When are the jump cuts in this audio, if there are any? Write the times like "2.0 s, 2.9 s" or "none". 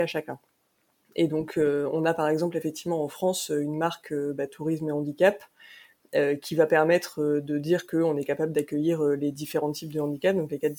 none